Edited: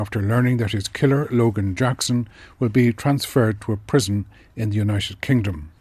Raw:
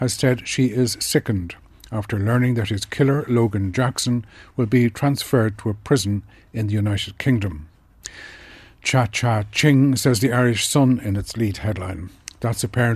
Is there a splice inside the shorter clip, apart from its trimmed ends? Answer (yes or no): no